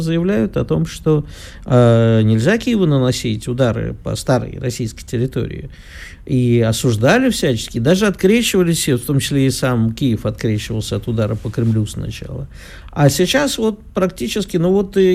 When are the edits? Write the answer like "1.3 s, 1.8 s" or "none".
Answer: none